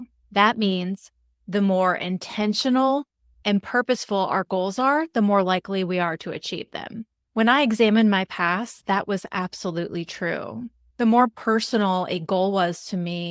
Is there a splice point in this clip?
yes; 1 cut; at 3.3 s

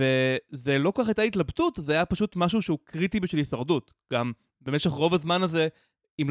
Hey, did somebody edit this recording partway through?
no; 0 cuts

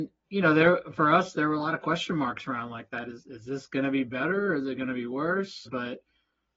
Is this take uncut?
no; 1 cut; at 5.7 s

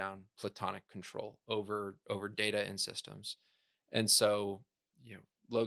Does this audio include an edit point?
no; 0 cuts

